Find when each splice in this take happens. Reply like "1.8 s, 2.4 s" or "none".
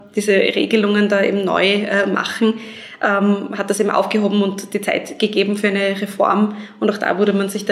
none